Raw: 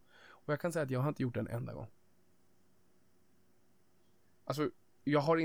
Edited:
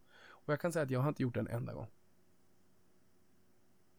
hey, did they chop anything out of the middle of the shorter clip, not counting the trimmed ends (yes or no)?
no